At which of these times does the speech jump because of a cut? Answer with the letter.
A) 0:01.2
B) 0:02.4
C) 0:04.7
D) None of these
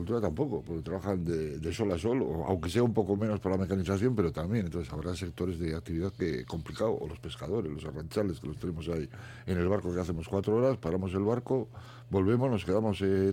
D